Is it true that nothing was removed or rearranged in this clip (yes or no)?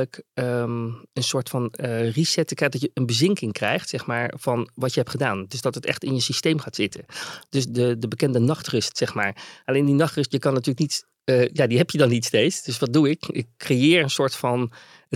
yes